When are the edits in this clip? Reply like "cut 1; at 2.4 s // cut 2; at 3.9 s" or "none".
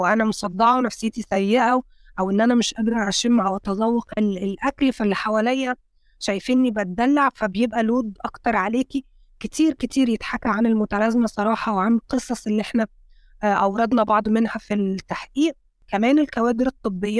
none